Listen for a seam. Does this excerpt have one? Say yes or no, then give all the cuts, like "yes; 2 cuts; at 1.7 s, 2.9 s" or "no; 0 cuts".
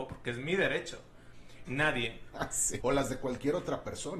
yes; 2 cuts; at 1.7 s, 2.8 s